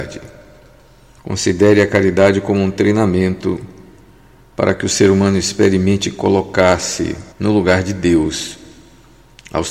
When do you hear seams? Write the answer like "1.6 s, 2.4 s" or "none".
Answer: 1.2 s, 7.3 s

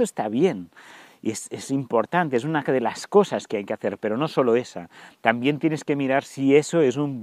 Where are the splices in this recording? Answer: none

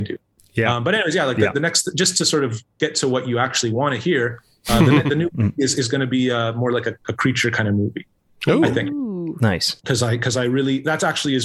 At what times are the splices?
9.8 s

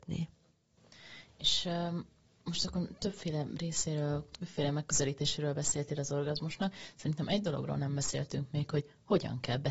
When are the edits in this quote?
none

